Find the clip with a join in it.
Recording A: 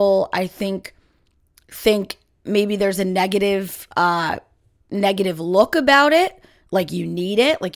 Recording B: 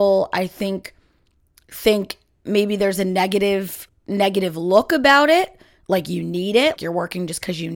B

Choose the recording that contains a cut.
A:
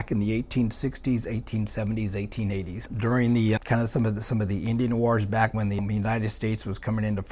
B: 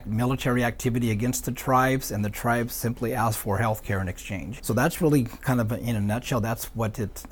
A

